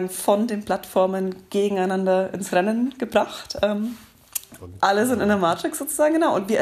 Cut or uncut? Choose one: cut